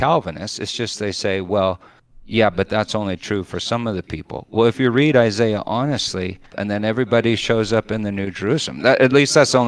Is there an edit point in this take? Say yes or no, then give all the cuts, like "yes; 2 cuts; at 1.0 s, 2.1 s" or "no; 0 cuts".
yes; 1 cut; at 6.5 s